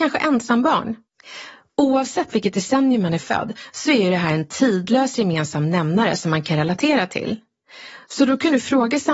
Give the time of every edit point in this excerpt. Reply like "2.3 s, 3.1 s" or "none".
none